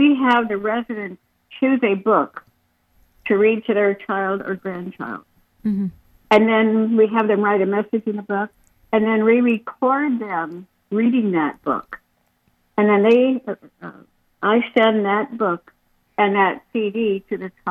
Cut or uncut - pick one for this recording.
uncut